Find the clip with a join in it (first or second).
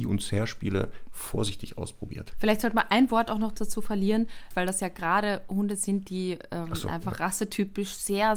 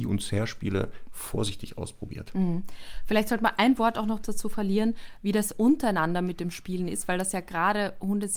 first